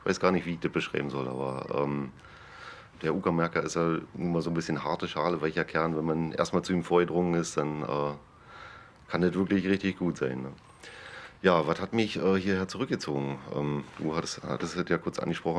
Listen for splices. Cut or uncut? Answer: uncut